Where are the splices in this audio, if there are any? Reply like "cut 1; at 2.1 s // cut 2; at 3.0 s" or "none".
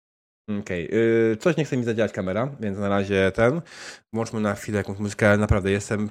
none